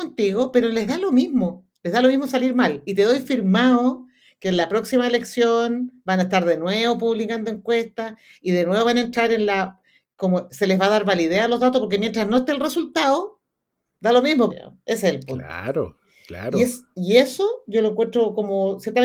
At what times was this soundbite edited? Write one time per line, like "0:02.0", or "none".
0:14.5